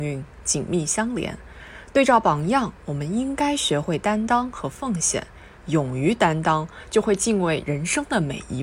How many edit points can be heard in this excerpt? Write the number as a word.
one